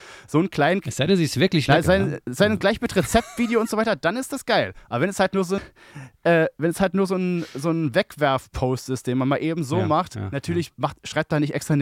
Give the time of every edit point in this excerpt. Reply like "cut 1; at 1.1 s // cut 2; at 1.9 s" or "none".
cut 1; at 5.6 s